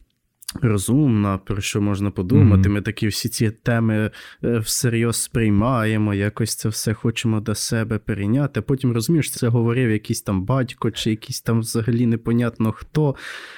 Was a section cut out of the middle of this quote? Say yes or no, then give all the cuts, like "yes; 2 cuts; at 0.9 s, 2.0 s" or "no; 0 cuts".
yes; 1 cut; at 9.3 s